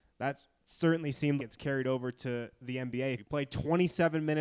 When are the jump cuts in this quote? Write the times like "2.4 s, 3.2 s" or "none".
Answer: 1.4 s, 3.2 s